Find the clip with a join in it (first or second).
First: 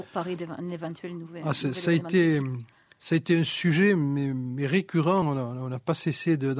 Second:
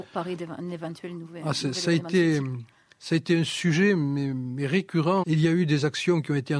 second